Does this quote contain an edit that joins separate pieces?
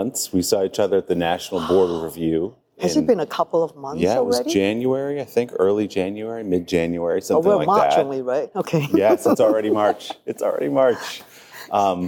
no; 0 cuts

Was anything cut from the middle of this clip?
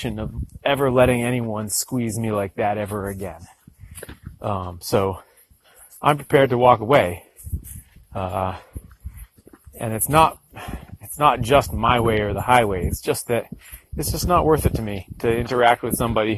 no; 0 cuts

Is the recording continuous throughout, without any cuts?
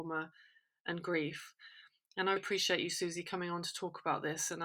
no; 1 cut; at 2.4 s

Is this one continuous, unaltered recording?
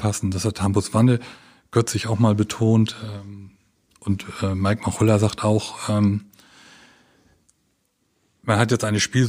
yes; 0 cuts

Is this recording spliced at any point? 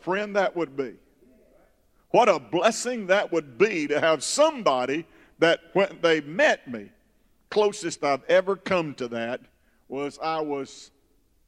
no; 0 cuts

